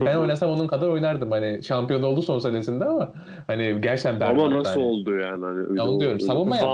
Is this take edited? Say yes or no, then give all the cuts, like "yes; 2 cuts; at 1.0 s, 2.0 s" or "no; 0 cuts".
no; 0 cuts